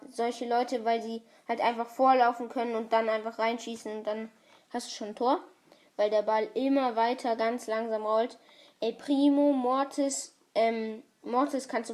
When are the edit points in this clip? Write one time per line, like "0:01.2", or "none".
none